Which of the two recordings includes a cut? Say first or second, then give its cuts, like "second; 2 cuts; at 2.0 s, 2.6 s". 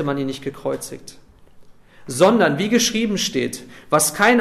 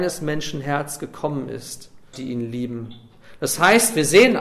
second; 1 cut; at 2.1 s